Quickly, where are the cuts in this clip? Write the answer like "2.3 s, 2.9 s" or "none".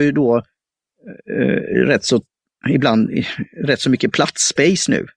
none